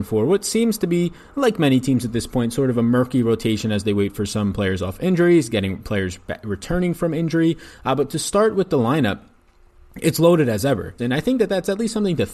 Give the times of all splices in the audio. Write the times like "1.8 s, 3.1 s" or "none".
11.0 s

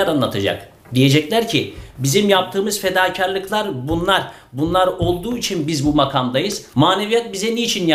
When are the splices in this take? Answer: 6.7 s

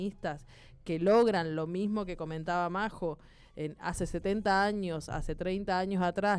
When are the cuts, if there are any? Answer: none

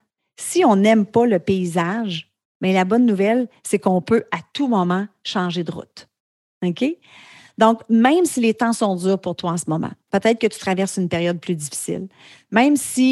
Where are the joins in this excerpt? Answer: none

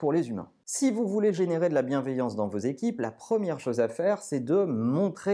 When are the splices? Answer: none

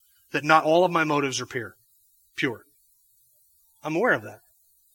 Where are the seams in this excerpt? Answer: none

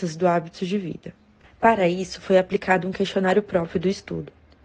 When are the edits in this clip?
none

